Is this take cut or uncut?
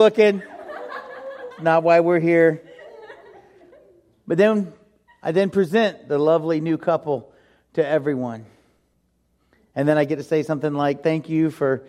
uncut